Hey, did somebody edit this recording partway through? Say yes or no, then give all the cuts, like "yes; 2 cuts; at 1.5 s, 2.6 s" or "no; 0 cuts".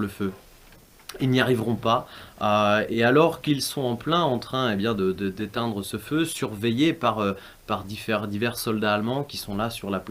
no; 0 cuts